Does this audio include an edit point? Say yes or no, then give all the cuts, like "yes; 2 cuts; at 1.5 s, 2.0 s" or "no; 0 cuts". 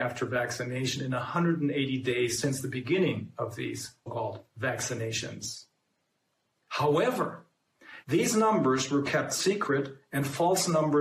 yes; 2 cuts; at 4.1 s, 8.0 s